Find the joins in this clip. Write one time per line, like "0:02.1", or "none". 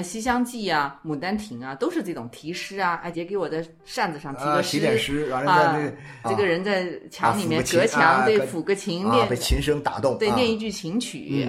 0:03.1
0:06.2